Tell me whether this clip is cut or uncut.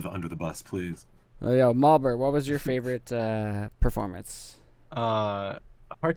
uncut